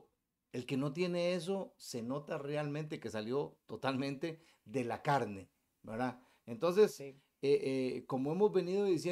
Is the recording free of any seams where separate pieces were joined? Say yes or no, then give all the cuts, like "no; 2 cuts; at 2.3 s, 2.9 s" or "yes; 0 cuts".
yes; 0 cuts